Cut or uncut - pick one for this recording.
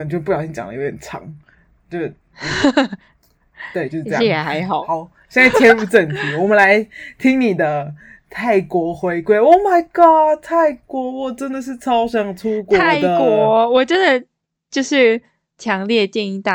uncut